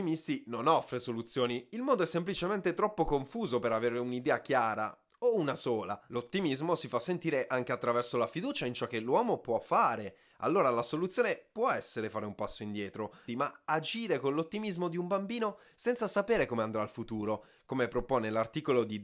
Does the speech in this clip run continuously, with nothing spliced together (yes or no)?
no